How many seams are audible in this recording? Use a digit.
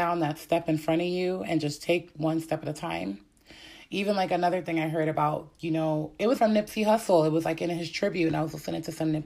1